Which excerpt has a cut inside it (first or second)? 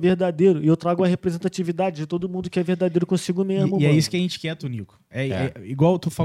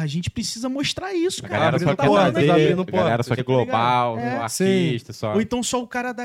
second